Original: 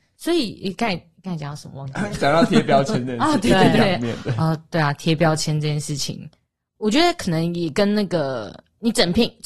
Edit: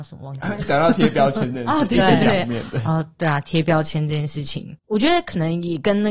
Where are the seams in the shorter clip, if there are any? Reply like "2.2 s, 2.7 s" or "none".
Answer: 4.8 s